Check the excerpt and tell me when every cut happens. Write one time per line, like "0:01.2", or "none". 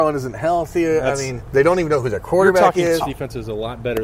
0:03.0